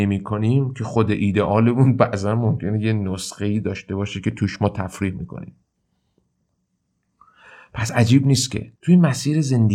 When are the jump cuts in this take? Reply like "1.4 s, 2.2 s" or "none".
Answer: 8.8 s

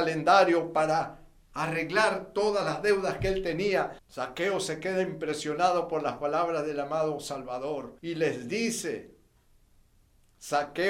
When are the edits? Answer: 4.0 s, 8.0 s

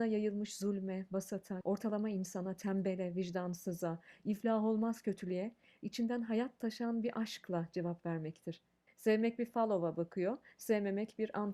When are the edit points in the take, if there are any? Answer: 1.6 s, 8.9 s

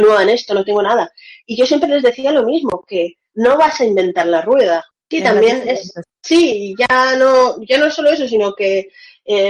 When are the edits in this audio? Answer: 4.9 s, 6.0 s

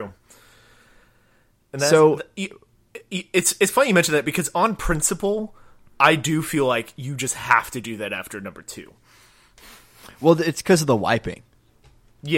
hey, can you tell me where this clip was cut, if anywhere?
none

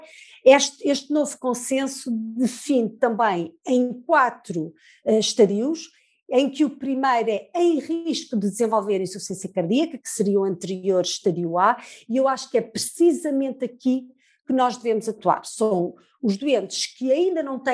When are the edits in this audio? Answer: none

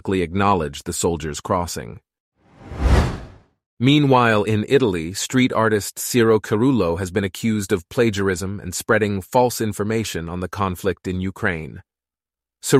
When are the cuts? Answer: none

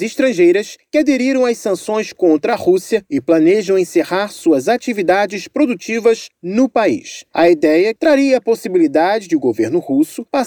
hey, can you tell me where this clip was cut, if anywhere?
8.0 s

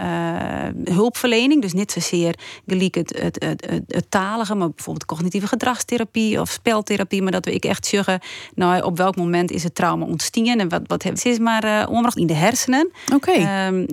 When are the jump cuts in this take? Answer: 11.2 s, 12.2 s

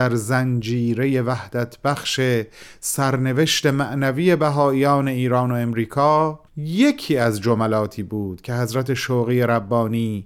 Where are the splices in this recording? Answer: 6.5 s

